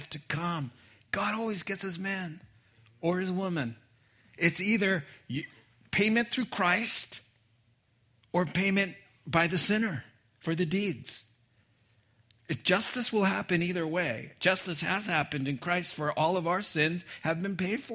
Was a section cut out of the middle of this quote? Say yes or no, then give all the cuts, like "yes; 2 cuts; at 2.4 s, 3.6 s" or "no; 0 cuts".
no; 0 cuts